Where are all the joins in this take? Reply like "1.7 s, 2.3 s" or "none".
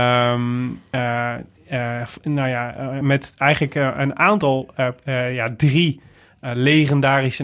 none